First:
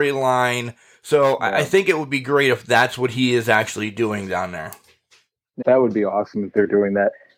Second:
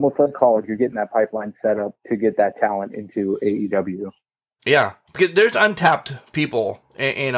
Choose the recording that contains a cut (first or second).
first